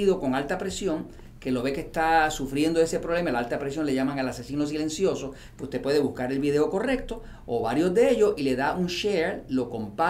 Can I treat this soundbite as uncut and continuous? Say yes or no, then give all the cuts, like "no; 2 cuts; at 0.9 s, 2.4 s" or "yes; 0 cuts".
yes; 0 cuts